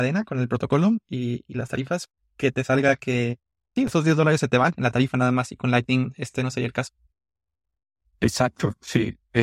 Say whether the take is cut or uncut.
uncut